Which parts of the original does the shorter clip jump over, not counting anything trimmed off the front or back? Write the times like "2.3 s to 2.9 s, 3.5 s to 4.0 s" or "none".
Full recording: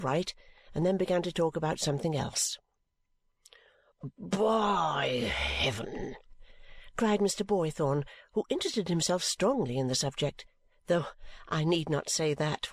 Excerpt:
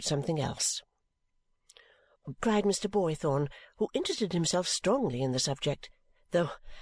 4.1 s to 6.9 s

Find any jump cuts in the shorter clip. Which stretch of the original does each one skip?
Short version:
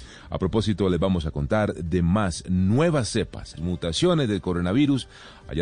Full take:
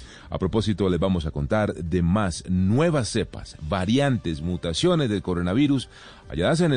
3.6 s to 4.4 s

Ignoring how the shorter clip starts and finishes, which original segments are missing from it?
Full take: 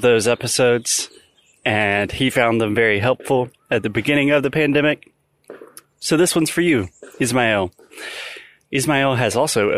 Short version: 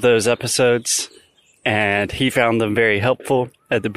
none

